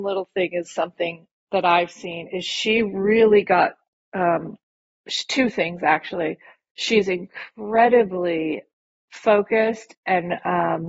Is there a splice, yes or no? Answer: yes